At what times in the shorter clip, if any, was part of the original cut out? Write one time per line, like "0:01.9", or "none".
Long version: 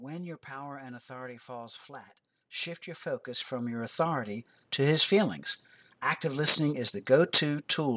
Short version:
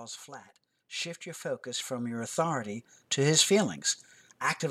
none